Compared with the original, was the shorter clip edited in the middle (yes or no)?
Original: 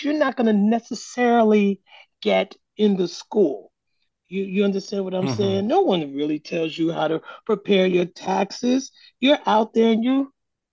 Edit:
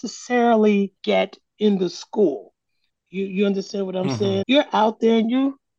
yes